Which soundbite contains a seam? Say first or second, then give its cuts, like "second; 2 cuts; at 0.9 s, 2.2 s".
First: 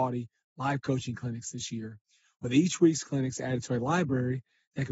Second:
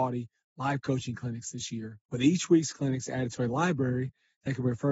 second; 1 cut; at 2.0 s